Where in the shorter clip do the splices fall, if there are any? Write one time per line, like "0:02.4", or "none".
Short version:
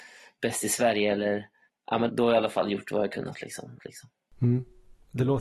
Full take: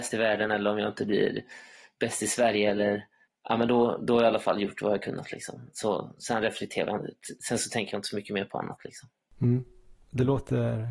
0:02.1
0:03.8